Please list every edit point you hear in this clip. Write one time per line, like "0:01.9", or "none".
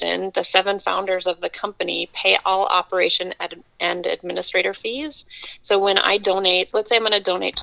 0:06.7

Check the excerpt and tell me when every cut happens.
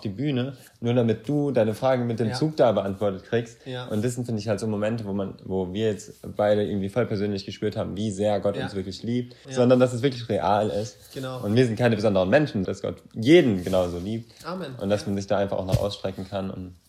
0:09.4
0:12.6

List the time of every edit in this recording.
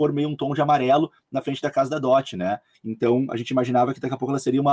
0:02.7

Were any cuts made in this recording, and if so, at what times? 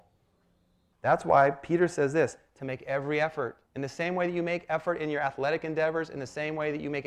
0:00.9
0:03.7

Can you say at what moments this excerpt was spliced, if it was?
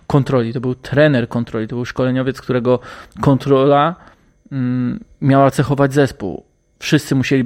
none

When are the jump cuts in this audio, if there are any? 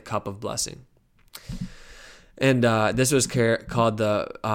none

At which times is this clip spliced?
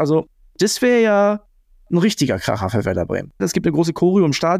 0:03.4

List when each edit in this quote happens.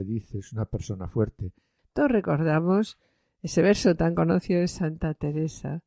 0:01.8

